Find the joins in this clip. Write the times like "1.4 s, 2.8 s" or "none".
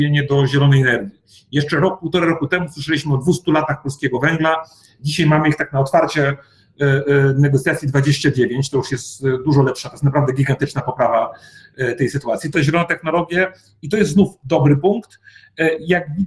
12.5 s